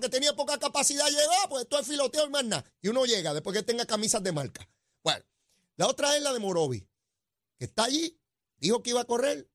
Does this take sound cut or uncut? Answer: uncut